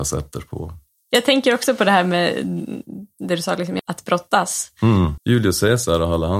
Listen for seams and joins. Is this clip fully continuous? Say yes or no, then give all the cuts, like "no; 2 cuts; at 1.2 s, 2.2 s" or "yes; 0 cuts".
no; 3 cuts; at 0.9 s, 3.8 s, 5.2 s